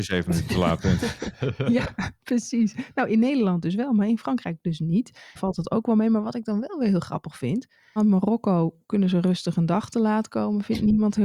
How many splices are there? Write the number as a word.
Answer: two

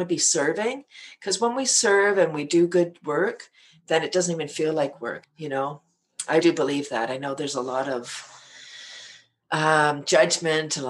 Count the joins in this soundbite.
two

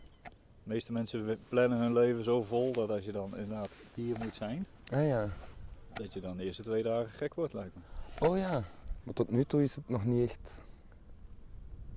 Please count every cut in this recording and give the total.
one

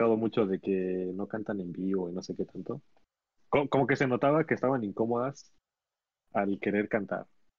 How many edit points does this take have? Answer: one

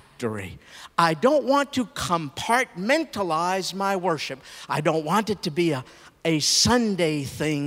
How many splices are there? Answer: zero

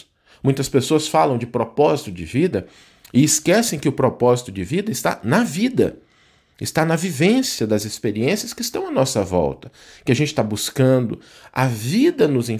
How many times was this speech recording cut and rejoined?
zero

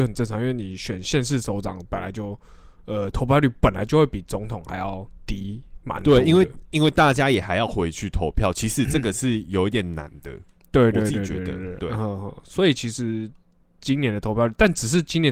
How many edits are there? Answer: zero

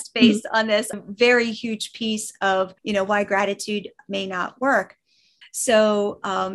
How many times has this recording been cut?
three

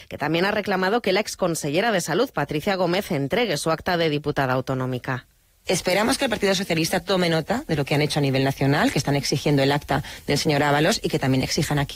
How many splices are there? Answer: zero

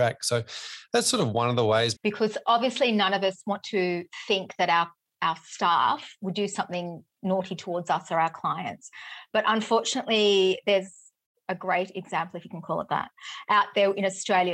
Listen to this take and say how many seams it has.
one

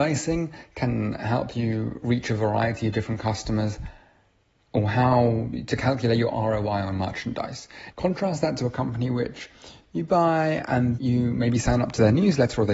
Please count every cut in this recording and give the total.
two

